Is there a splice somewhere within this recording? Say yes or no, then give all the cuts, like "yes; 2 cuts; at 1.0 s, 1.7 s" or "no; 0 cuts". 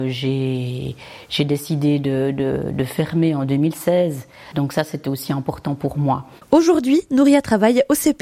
yes; 1 cut; at 4.5 s